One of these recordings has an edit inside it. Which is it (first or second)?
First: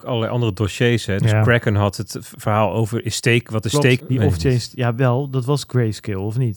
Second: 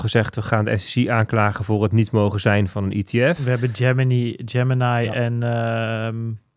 first